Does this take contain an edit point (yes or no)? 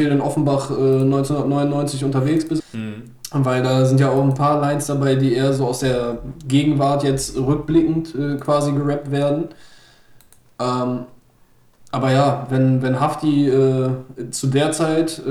yes